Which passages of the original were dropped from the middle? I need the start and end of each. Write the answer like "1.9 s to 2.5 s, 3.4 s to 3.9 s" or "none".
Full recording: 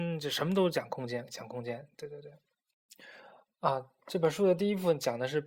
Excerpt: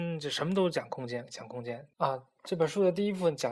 1.9 s to 3.6 s